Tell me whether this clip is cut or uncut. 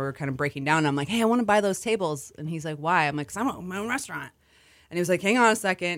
uncut